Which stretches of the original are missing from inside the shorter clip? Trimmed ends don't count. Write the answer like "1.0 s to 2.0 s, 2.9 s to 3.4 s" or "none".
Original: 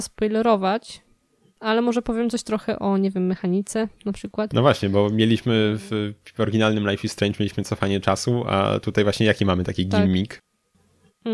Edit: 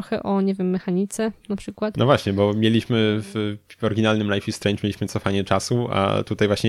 none